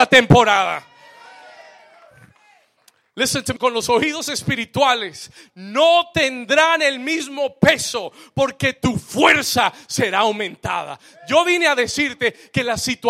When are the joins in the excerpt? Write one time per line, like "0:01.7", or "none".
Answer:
0:03.6